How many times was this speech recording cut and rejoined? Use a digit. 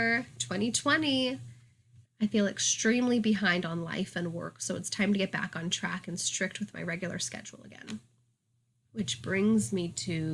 1